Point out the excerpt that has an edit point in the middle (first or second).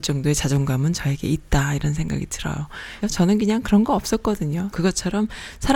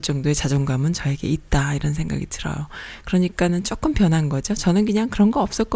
first